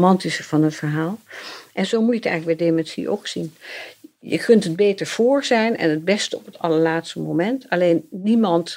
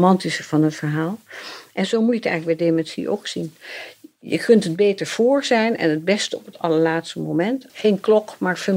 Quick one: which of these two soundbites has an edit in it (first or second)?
second